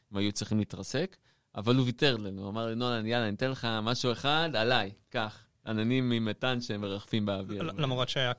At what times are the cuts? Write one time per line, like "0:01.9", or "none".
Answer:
none